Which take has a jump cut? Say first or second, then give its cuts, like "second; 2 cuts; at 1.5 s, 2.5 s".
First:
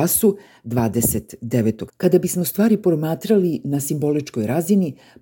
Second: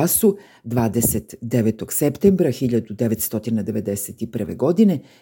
first; 1 cut; at 1.9 s